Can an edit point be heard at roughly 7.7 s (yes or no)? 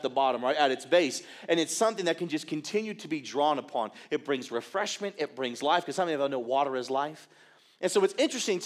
no